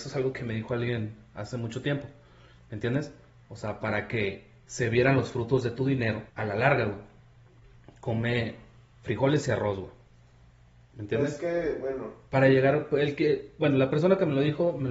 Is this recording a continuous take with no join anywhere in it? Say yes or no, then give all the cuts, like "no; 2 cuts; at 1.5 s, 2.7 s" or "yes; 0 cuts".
no; 1 cut; at 6.3 s